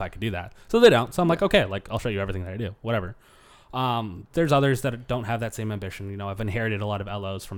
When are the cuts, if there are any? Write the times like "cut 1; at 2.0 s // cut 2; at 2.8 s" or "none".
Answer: cut 1; at 4.3 s